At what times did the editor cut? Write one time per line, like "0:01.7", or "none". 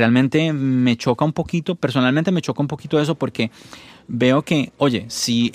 none